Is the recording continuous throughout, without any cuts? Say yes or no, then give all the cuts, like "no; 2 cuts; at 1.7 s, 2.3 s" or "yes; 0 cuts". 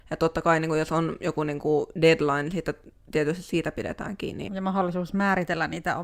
no; 1 cut; at 4.5 s